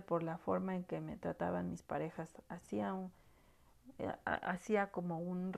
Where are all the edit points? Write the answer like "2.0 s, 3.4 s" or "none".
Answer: none